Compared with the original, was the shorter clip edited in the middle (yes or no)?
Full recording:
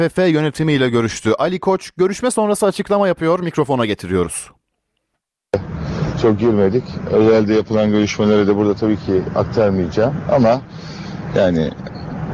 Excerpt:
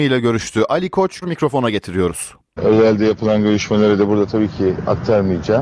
yes